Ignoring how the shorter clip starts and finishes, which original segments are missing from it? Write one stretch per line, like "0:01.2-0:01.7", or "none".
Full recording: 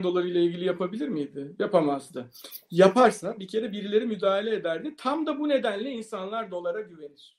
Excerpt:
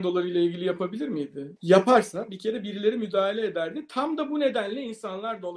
0:01.6-0:02.6